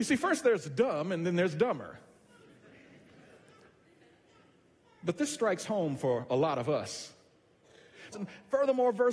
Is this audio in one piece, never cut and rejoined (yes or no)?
no